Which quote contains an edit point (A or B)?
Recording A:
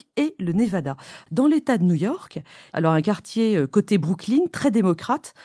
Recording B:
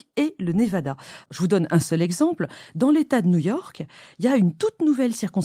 A